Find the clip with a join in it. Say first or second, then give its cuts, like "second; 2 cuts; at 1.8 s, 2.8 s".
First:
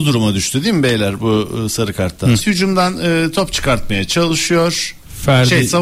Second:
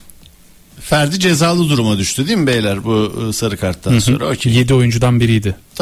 first; 1 cut; at 2.4 s